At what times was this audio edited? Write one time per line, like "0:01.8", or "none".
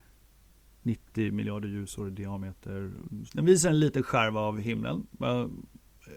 0:03.3